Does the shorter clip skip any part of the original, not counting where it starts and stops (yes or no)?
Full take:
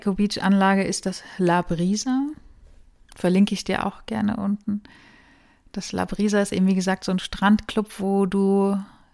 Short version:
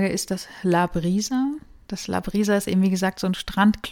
yes